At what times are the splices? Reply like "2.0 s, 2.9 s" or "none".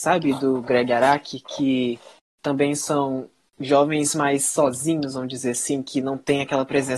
none